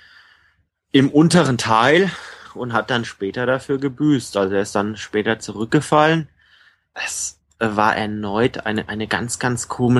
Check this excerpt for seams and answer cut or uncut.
uncut